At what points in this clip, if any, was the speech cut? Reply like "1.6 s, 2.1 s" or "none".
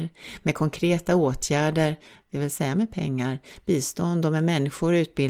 none